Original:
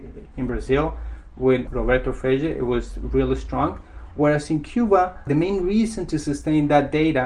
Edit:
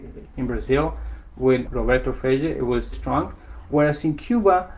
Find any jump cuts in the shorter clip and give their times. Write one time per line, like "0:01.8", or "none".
0:02.9